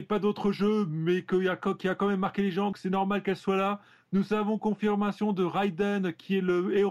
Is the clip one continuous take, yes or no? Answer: no